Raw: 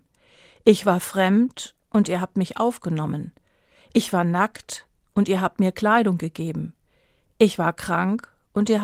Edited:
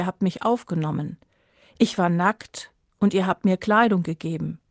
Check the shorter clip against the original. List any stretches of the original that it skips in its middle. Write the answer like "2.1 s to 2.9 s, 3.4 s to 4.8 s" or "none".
none